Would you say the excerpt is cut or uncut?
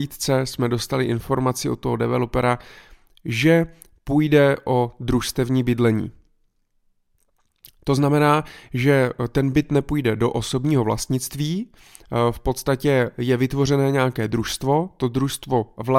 uncut